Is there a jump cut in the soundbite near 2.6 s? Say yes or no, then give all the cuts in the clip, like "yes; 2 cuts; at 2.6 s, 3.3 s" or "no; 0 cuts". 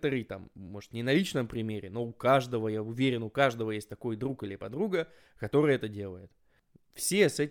no; 0 cuts